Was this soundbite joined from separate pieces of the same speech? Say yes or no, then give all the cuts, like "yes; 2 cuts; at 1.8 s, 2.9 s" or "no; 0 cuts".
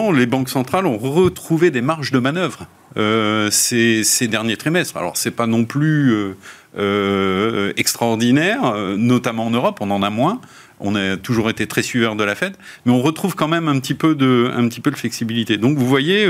no; 0 cuts